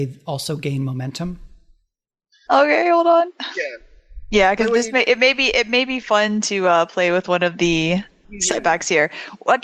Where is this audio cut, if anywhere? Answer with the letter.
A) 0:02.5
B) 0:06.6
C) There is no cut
A